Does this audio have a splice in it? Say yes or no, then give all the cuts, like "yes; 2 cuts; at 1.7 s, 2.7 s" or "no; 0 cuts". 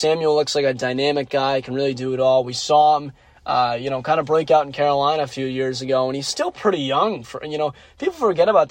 no; 0 cuts